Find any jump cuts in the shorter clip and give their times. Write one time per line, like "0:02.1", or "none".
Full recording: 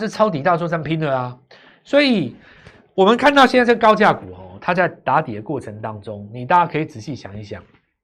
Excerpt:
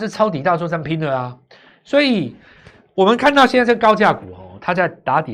none